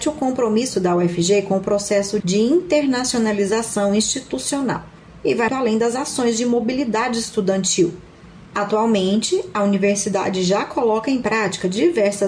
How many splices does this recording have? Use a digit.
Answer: 1